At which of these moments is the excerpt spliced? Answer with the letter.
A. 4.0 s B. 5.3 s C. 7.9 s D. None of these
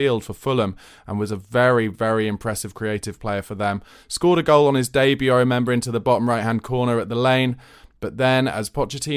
D